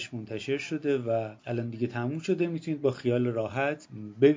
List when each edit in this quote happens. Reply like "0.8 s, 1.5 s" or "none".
1.4 s